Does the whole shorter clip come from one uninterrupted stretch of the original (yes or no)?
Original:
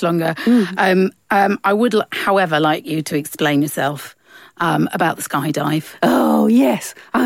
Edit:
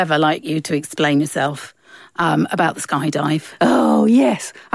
yes